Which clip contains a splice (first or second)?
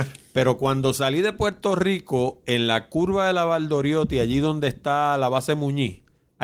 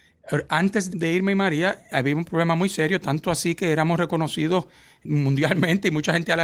second